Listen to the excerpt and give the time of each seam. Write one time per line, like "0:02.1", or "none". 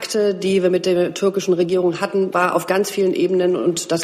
0:02.3